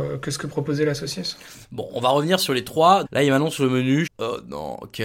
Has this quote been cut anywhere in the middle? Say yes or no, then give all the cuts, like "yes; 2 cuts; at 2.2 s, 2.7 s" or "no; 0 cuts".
yes; 2 cuts; at 3.0 s, 4.1 s